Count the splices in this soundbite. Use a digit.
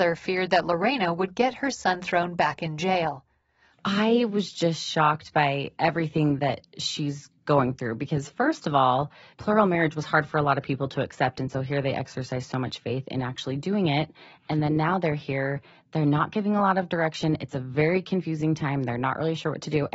2